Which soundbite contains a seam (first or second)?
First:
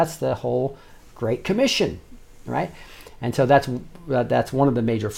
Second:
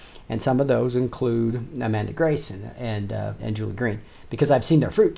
second